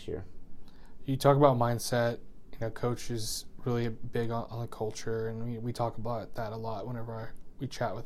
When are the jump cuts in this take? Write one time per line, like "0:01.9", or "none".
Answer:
none